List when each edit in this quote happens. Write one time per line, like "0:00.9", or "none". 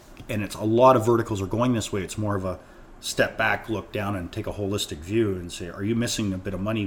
none